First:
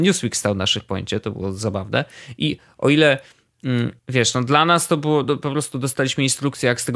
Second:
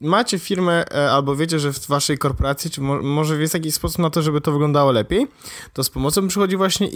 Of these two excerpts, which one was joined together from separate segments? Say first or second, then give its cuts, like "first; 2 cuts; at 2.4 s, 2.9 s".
first; 1 cut; at 4.0 s